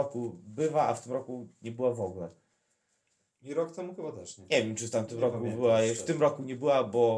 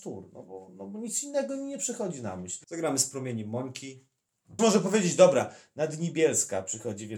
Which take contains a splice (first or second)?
second